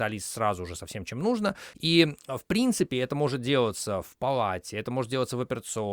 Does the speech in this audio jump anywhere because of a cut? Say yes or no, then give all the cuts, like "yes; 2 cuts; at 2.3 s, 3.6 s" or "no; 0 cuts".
no; 0 cuts